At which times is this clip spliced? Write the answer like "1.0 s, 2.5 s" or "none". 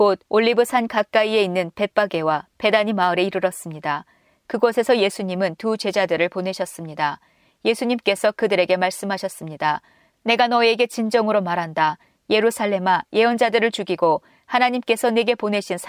10.1 s, 12.2 s